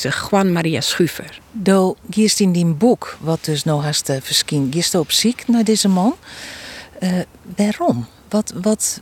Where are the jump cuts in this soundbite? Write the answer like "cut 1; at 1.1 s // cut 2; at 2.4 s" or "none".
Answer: cut 1; at 1.4 s